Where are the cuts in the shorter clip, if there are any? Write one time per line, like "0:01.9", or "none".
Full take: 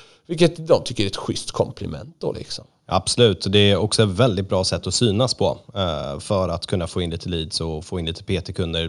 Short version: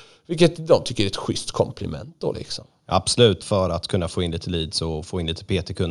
0:03.4

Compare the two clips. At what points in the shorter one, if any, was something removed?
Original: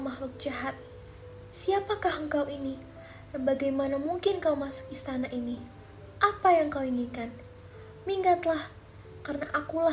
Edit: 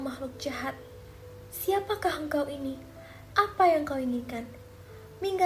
0:03.3

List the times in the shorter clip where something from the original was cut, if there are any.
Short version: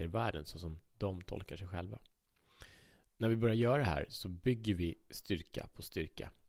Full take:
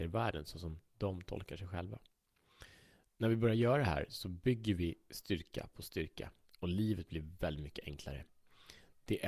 none

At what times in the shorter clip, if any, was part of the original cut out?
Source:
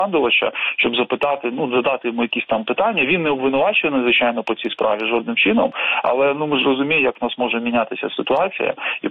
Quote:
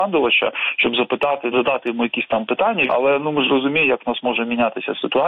0:01.5
0:02.9

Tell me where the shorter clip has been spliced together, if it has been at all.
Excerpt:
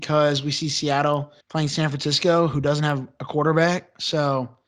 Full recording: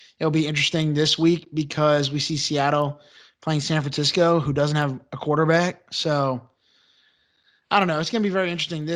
0:01.4

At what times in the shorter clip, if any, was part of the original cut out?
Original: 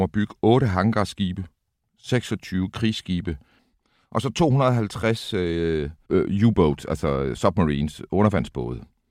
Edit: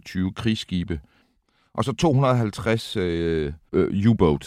none

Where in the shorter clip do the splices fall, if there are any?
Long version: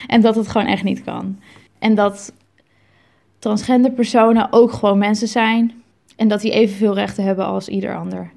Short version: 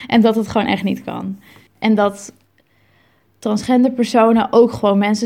none

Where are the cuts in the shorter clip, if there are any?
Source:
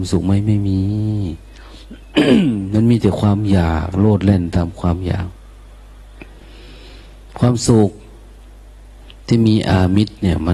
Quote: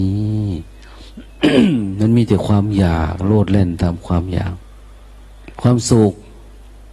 0:05.5

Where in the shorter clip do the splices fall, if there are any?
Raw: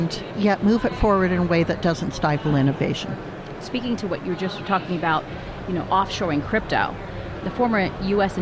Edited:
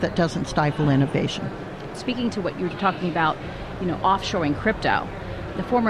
0:02.7

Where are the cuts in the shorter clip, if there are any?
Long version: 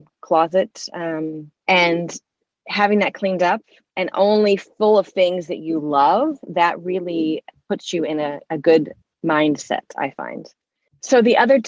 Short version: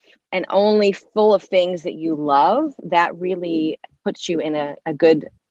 none

